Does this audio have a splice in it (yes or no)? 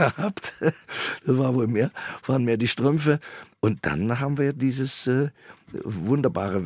no